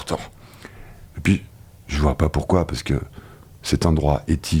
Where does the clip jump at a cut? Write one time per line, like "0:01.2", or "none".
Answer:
0:01.1